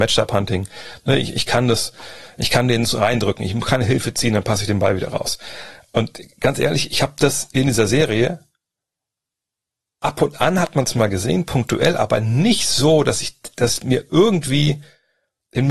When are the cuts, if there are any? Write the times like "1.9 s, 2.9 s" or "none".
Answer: none